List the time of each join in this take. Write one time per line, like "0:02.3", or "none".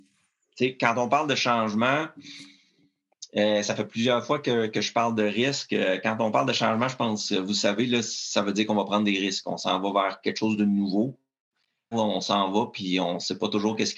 0:11.9